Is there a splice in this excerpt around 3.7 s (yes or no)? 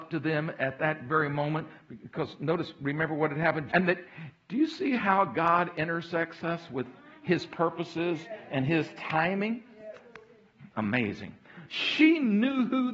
yes